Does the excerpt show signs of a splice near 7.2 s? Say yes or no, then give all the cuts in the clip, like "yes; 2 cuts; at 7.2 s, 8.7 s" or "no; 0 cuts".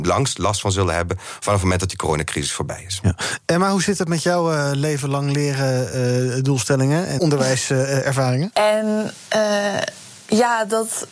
yes; 2 cuts; at 7.2 s, 8.5 s